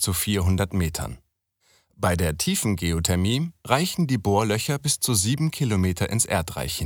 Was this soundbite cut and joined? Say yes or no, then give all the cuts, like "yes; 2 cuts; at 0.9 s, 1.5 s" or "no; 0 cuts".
no; 0 cuts